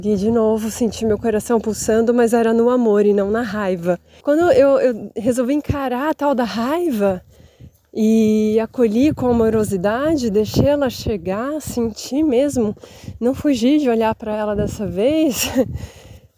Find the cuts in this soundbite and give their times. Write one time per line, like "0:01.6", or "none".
0:04.2